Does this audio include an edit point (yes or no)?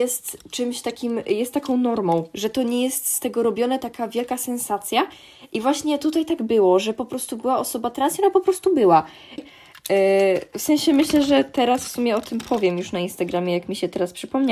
yes